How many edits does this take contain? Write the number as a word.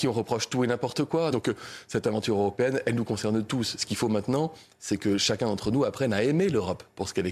one